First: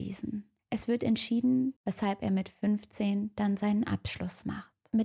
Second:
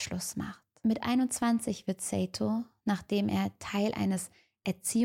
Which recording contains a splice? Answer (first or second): first